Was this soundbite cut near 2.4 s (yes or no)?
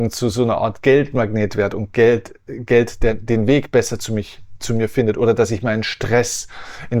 no